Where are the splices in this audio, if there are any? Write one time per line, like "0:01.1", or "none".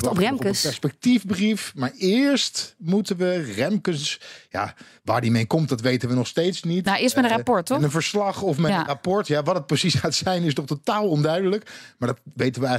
none